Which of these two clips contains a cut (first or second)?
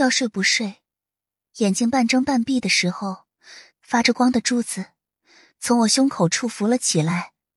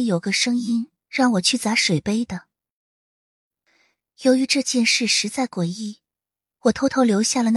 first